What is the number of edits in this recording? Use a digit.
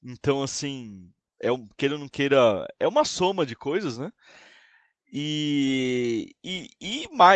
0